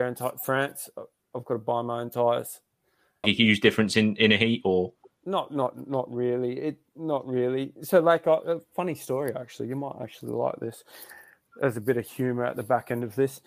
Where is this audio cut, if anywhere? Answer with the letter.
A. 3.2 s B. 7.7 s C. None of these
A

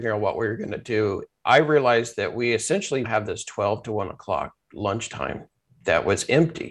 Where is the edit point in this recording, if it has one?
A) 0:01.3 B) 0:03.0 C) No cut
B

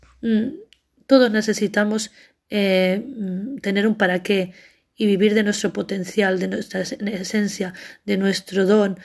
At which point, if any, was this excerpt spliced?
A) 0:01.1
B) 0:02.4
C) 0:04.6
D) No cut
D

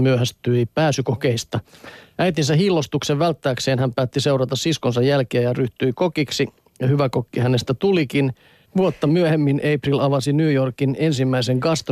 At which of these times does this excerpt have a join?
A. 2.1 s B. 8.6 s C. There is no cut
B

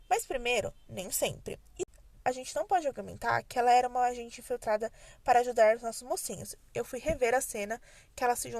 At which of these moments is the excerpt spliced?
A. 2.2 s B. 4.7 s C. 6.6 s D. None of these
A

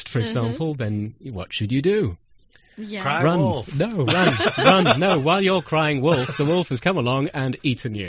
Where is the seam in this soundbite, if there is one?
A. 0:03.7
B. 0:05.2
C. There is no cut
C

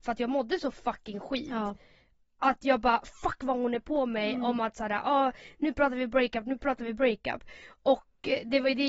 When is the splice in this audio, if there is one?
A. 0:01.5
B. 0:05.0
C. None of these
C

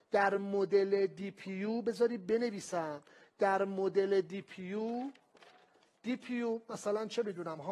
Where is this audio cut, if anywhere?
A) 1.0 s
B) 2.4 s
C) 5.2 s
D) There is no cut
D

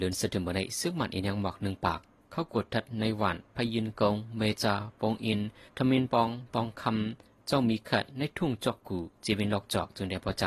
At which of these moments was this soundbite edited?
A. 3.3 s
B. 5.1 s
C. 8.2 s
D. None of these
D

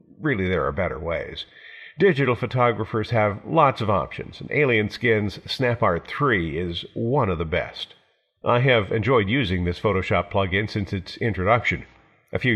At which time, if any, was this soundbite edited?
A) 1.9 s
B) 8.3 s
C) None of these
C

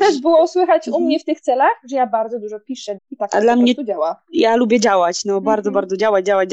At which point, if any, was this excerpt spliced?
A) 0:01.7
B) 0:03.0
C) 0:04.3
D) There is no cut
B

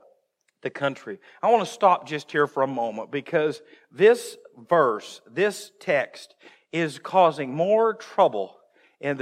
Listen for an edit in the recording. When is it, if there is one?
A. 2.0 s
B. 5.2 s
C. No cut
C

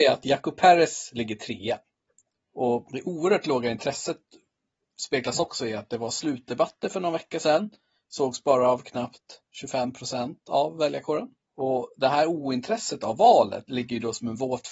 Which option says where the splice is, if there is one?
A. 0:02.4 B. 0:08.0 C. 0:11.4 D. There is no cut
A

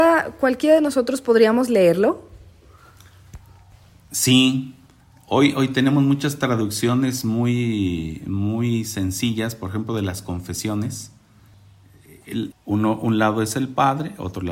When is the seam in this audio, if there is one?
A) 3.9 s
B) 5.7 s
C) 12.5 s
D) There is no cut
C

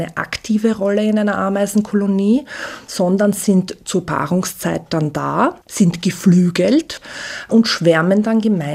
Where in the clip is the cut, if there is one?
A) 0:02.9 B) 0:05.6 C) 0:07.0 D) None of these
B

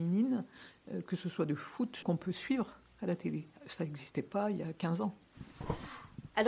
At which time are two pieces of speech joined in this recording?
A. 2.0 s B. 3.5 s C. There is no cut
A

